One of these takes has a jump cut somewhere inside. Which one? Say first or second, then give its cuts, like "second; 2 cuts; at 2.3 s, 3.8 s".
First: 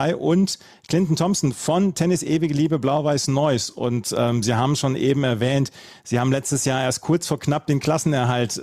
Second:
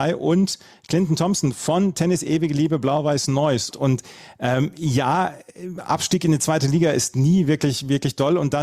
second; 1 cut; at 3.7 s